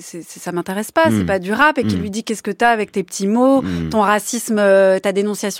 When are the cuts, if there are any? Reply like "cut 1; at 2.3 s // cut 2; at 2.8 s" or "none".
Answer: none